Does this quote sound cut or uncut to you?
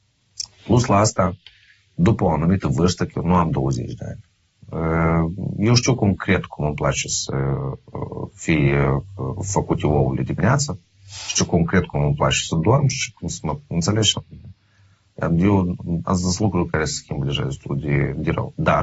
uncut